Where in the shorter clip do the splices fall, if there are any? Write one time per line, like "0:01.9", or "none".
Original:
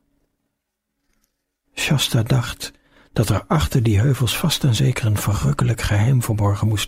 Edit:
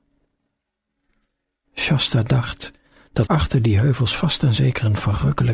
0:03.3